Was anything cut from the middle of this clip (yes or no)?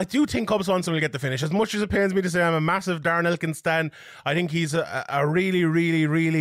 no